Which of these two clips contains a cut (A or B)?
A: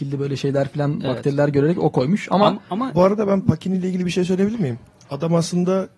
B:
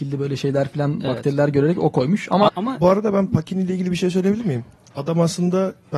B